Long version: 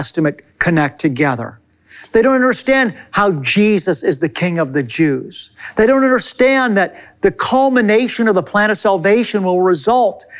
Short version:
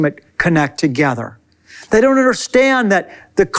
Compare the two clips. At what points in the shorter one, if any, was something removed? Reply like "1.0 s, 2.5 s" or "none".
1.9 s